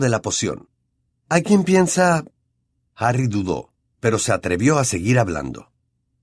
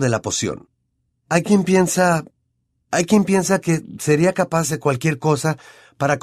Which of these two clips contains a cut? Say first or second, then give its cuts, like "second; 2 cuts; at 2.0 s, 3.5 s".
second; 1 cut; at 2.8 s